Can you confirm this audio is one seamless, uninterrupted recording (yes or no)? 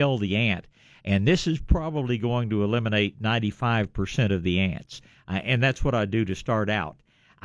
yes